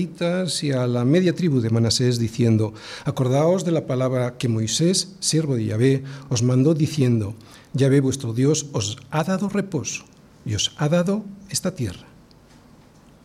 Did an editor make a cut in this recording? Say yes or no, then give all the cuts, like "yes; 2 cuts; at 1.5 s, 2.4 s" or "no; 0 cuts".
no; 0 cuts